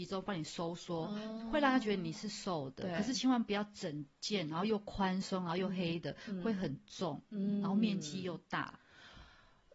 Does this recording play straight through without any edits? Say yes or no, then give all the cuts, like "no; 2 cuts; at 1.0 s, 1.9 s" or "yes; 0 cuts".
yes; 0 cuts